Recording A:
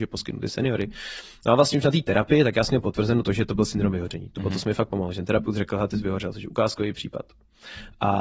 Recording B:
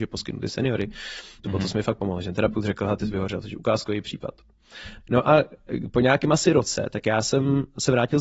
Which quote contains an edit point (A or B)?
B